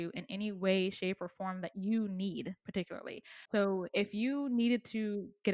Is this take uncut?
no; 1 cut; at 3.5 s

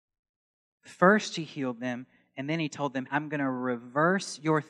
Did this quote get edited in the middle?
yes; 1 cut; at 3.1 s

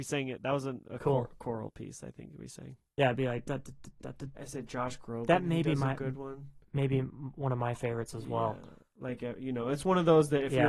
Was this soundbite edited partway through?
yes; 1 cut; at 4.4 s

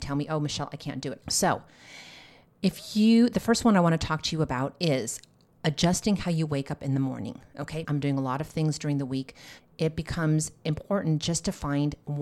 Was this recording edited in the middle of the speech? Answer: yes; 3 cuts; at 1.2 s, 7.8 s, 9.6 s

